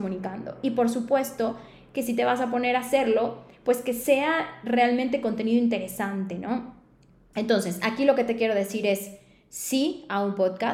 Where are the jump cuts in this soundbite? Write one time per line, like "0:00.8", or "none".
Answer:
none